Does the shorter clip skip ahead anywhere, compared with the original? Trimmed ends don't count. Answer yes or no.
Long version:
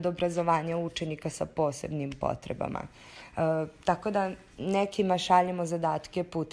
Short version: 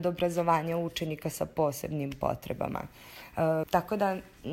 yes